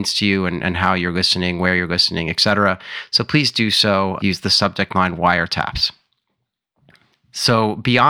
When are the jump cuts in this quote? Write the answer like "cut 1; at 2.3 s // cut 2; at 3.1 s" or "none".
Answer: cut 1; at 4.2 s